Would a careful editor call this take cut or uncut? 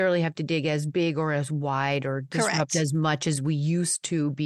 uncut